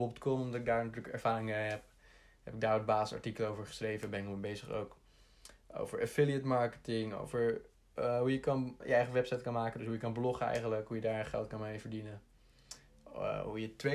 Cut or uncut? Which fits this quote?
cut